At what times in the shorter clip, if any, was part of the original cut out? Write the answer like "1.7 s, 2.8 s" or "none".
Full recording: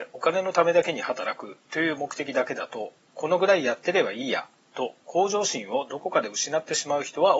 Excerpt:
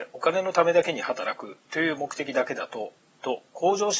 3.1 s